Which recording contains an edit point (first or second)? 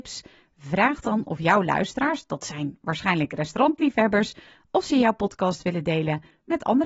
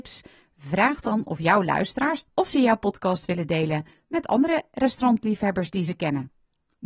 second